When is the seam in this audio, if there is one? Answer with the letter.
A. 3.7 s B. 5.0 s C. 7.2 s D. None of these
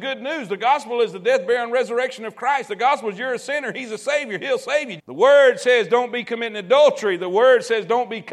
B